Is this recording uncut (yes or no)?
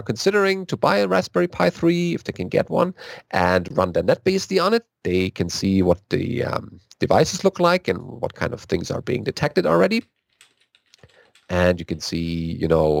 yes